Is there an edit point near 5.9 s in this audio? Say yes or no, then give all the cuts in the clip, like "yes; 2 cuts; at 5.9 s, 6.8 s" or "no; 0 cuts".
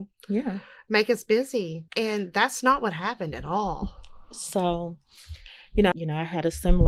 yes; 2 cuts; at 1.9 s, 5.9 s